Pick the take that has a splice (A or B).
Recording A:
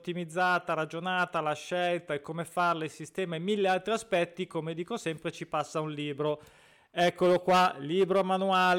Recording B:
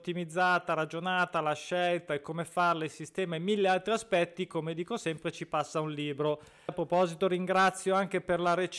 B